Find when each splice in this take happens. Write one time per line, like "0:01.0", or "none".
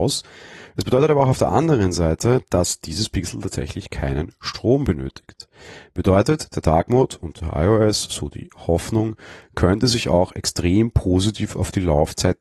none

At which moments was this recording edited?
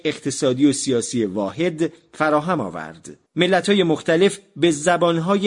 0:03.3

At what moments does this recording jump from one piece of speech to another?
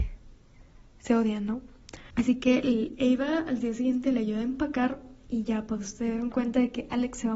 0:02.1

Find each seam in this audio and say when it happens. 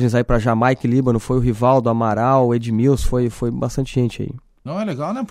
none

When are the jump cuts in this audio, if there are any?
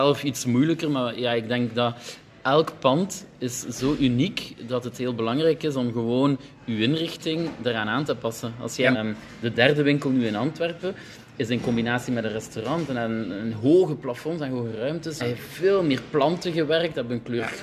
0:08.9
0:15.2

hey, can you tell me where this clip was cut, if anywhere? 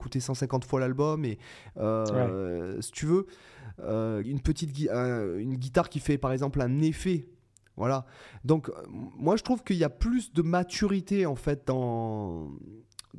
0:04.2

